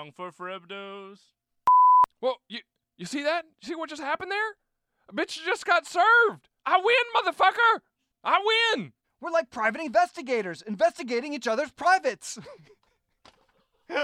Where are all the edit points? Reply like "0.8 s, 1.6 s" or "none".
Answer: 6.6 s, 9.0 s